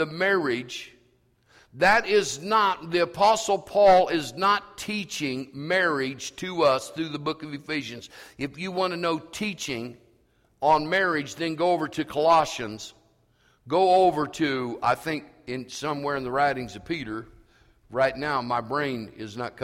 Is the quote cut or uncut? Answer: uncut